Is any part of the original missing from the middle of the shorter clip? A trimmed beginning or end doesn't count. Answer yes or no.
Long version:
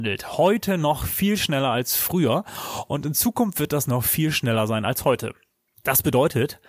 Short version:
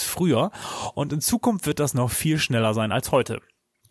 no